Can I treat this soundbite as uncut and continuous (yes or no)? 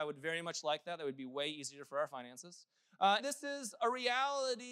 no